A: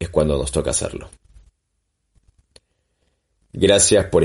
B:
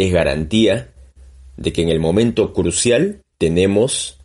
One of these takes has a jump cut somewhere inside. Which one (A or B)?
B